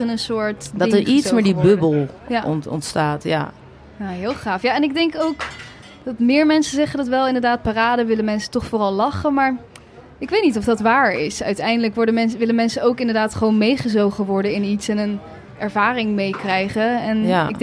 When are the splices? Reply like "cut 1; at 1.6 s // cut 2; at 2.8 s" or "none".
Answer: none